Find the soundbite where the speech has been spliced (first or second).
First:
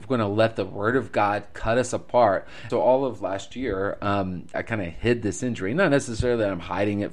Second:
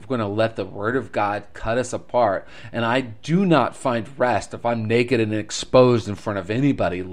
first